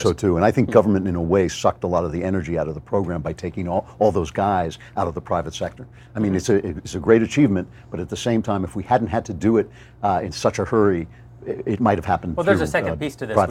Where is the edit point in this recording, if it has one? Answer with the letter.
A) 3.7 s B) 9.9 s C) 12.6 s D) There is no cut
D